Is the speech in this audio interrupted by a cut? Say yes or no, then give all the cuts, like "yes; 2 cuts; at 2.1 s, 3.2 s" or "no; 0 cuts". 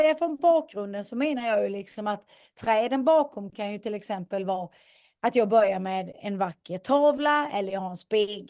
no; 0 cuts